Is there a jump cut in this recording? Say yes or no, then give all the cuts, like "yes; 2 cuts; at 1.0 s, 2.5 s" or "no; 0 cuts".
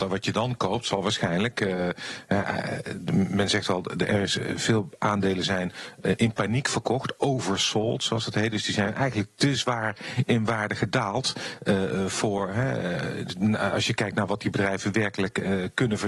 no; 0 cuts